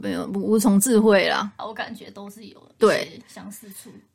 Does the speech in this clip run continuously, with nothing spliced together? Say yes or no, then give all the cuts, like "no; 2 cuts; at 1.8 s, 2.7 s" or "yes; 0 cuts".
no; 1 cut; at 1.6 s